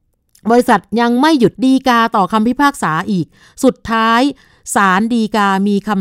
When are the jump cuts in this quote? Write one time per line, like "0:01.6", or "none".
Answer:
0:01.5